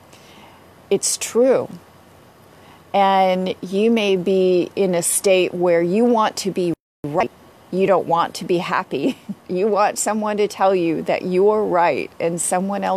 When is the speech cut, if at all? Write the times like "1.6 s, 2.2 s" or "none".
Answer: 9.4 s